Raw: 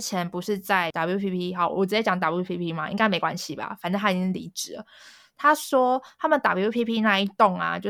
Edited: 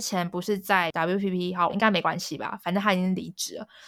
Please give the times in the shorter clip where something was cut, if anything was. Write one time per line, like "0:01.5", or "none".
0:01.7